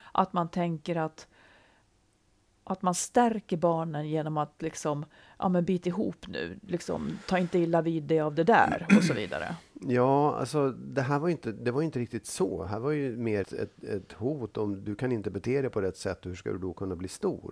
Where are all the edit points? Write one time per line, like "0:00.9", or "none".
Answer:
0:13.4